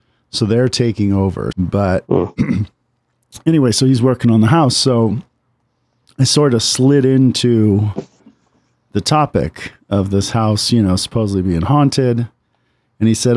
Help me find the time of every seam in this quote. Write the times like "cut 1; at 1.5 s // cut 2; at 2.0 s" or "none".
cut 1; at 1.5 s